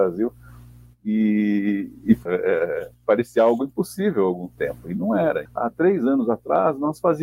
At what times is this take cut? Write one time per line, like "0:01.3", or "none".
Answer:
0:02.3
0:05.5